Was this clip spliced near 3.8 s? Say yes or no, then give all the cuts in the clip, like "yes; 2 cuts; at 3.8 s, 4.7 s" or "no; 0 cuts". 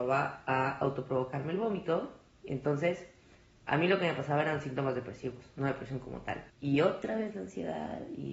no; 2 cuts; at 2.4 s, 6.5 s